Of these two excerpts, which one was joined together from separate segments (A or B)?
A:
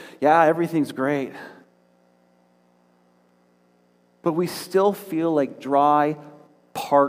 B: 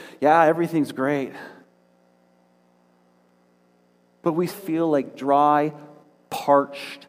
B